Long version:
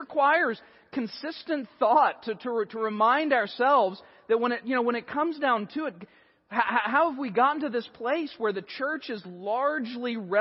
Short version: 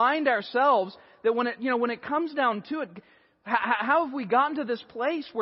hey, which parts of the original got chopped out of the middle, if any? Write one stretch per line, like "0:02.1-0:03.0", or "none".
none